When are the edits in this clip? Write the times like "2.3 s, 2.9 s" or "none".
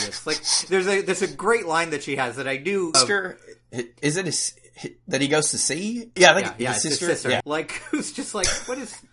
2.9 s, 6.2 s, 7.4 s